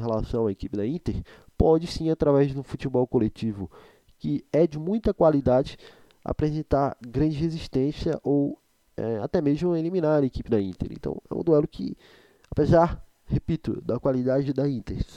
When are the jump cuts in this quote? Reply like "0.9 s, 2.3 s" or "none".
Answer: none